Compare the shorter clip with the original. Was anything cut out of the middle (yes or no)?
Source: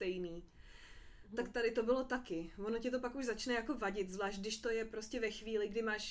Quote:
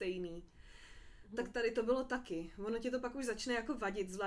no